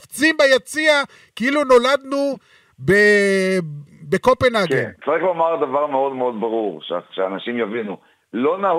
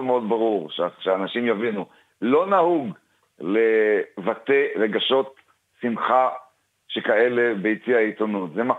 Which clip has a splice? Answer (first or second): first